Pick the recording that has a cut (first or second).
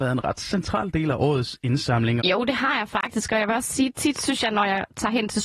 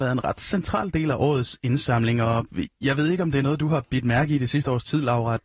first